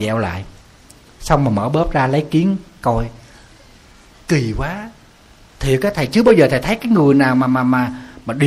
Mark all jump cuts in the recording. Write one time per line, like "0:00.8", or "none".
none